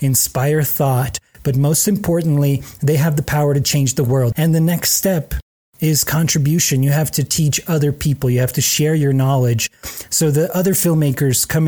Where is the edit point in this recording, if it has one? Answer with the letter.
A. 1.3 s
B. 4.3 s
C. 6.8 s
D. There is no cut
B